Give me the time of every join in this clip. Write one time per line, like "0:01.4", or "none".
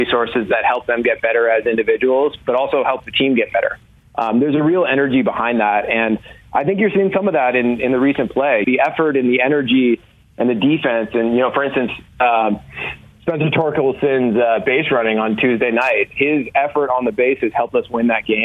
0:08.6